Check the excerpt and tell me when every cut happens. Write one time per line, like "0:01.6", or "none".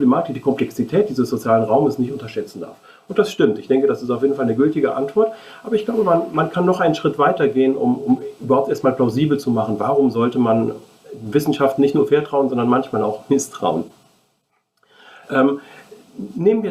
none